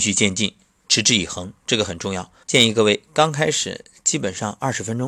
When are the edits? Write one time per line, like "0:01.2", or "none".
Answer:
0:02.4